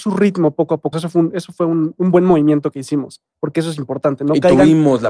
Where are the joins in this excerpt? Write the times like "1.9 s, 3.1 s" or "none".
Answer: 0.9 s